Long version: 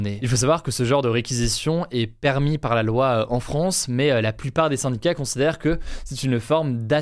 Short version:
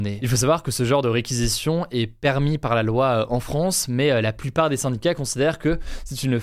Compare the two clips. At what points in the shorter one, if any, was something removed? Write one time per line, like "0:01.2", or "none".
none

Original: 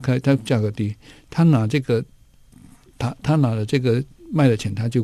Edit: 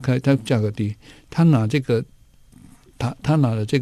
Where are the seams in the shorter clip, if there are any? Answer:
none

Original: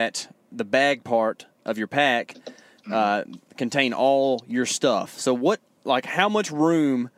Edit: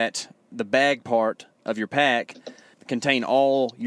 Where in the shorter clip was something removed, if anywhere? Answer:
0:02.7

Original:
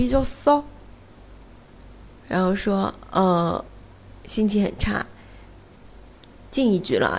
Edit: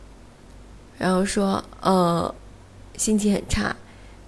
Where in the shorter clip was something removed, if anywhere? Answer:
none

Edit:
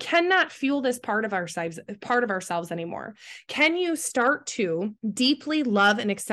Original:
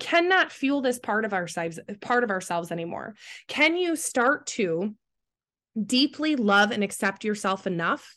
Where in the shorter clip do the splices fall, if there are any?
0:05.0

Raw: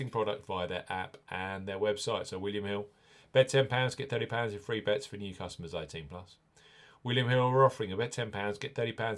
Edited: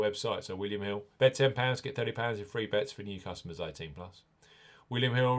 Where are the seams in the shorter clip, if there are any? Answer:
0:01.1

